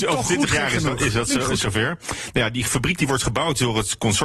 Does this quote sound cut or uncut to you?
uncut